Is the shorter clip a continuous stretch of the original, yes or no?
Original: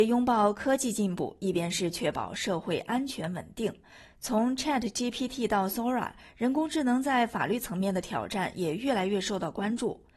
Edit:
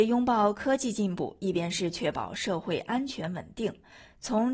yes